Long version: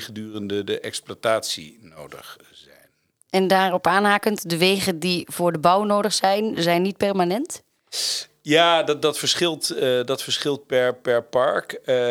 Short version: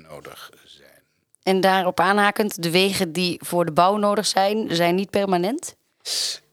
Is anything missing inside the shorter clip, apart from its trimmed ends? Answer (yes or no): no